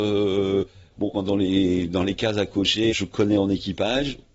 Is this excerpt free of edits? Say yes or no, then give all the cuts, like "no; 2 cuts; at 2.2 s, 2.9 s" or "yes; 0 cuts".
no; 2 cuts; at 1.1 s, 2.9 s